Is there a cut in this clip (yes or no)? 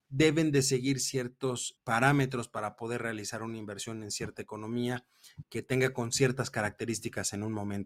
yes